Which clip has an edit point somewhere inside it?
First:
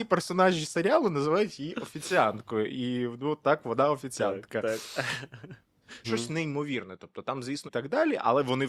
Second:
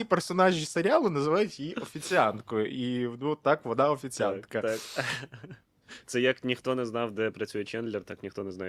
first; 2 cuts; at 6.0 s, 7.7 s

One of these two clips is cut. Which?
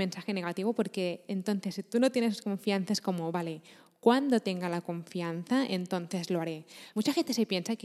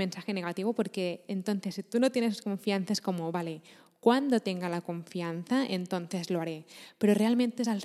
first; 1 cut; at 6.9 s

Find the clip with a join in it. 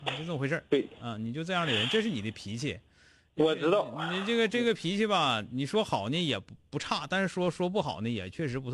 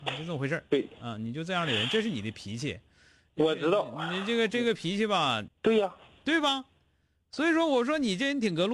second; 1 cut; at 5.5 s

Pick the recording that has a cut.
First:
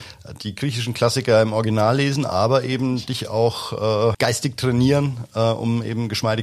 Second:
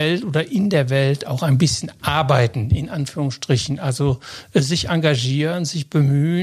first; 1 cut; at 4.1 s

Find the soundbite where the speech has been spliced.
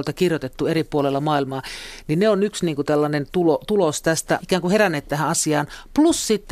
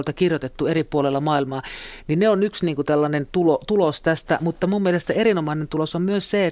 first; 1 cut; at 4.4 s

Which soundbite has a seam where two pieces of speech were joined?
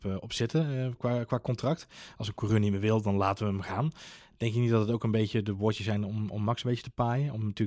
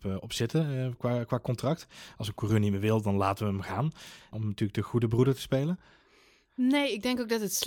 second; 1 cut; at 4.3 s

